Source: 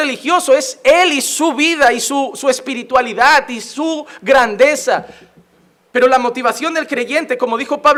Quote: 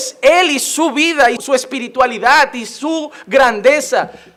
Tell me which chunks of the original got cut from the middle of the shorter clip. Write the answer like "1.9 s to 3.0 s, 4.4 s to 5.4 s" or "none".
2.0 s to 2.3 s